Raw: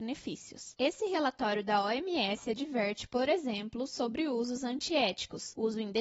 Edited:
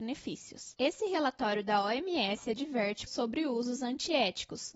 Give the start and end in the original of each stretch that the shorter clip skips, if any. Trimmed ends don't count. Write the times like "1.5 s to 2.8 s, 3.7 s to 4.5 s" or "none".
3.1 s to 3.9 s